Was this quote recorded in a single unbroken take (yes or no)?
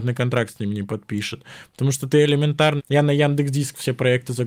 no